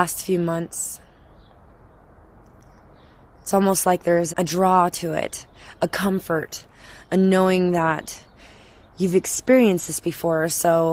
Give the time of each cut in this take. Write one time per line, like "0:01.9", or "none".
0:04.3

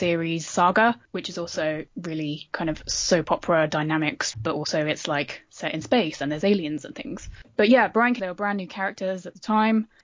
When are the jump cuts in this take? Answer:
0:04.3
0:08.2

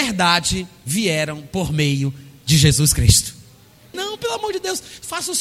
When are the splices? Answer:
0:03.9

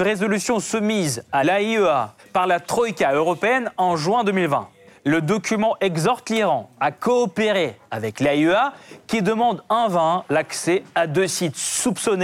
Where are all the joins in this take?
none

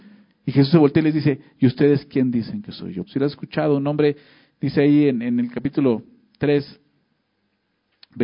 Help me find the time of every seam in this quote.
0:03.0

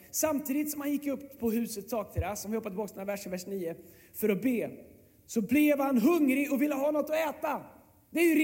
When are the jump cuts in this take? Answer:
none

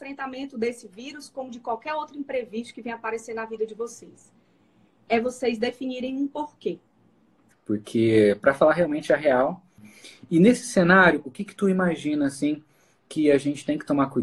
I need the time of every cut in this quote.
0:07.5
0:11.2

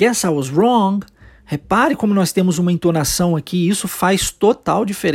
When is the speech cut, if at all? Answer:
none

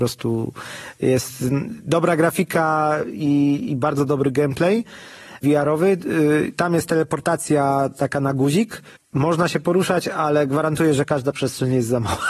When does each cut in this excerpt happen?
none

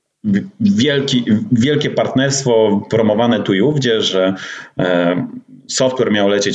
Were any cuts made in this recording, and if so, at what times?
none

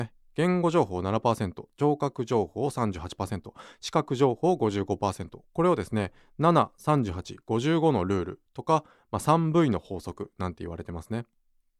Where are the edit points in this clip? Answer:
none

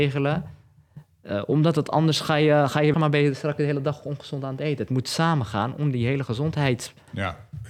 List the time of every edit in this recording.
0:02.9

